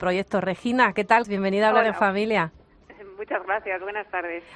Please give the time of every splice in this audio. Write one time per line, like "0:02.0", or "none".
0:01.2